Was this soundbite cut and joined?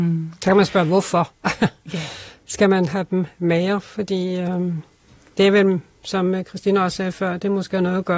no; 0 cuts

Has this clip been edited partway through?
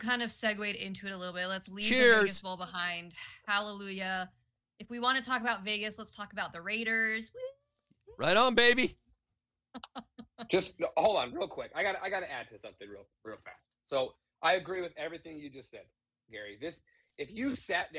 no; 0 cuts

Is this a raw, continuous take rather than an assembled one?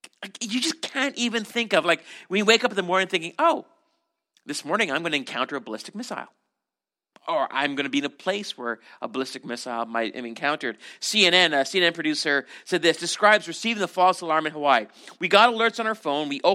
yes; 0 cuts

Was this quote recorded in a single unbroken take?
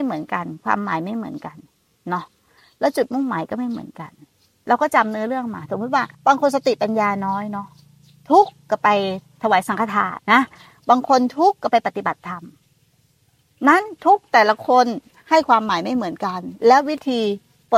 no; 2 cuts; at 6.1 s, 10.2 s

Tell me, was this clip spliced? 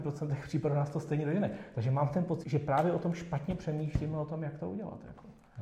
yes; 1 cut; at 2.4 s

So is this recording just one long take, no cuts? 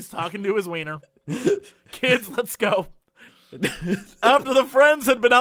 no; 1 cut; at 3.3 s

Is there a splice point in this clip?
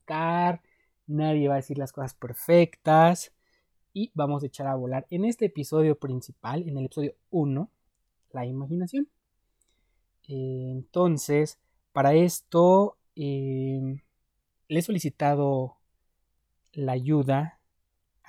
no; 0 cuts

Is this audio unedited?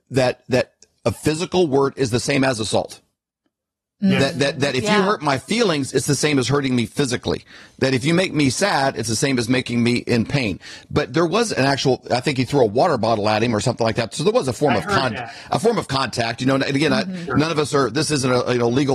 yes; 0 cuts

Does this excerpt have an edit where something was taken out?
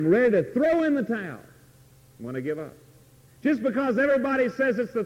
yes; 1 cut; at 3.3 s

